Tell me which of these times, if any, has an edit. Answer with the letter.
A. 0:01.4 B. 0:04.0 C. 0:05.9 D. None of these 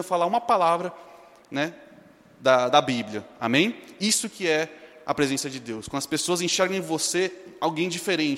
D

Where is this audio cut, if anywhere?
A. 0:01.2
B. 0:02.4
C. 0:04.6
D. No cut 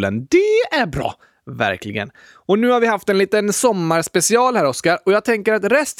D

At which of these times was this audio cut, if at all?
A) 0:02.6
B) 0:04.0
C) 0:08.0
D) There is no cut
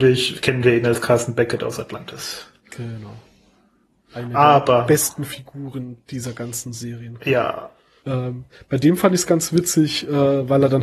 C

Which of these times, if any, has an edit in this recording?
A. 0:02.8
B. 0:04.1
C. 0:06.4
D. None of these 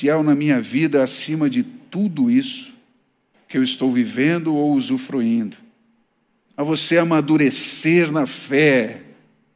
C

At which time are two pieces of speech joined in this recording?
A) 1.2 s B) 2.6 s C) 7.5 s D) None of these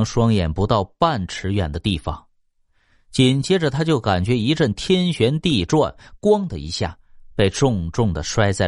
D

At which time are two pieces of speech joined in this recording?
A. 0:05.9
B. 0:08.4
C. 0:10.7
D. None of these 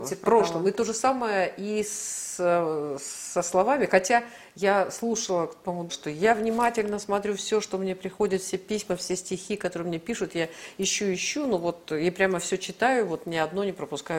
A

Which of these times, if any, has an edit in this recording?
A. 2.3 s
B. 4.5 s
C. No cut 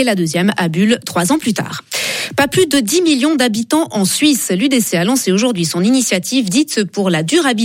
C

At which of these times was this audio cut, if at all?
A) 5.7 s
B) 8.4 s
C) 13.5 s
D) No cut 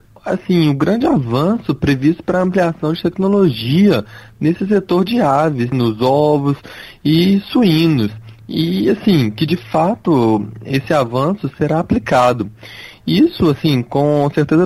A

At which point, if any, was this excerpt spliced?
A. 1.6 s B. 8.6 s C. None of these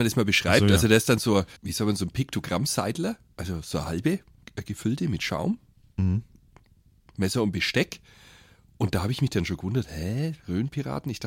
A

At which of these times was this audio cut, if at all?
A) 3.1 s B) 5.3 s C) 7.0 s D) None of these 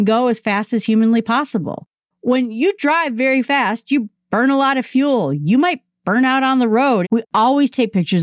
C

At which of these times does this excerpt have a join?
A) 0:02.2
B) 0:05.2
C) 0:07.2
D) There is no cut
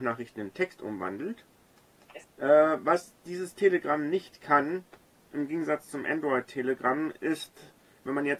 A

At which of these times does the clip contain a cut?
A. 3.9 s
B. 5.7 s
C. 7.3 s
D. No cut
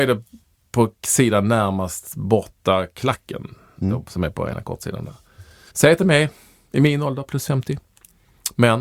B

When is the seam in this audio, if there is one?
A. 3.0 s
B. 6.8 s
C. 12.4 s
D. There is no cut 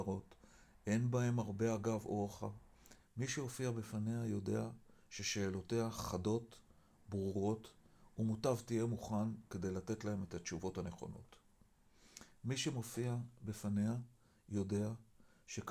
A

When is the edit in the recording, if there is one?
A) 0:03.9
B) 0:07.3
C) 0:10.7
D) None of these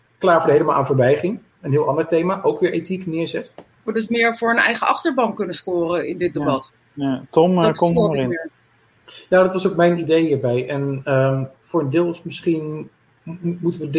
A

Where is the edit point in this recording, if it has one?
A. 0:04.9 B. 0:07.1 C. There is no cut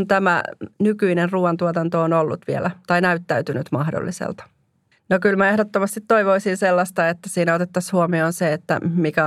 A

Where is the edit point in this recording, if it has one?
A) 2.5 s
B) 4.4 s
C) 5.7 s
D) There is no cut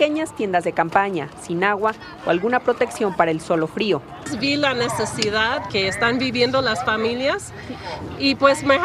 C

